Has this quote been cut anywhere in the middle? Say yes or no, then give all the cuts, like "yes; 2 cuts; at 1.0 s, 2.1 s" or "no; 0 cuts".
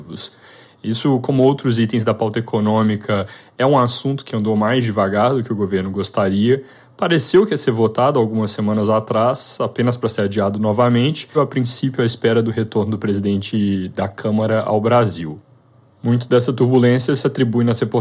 yes; 1 cut; at 11.3 s